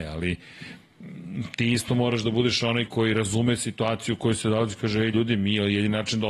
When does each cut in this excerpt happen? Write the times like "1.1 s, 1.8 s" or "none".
2.9 s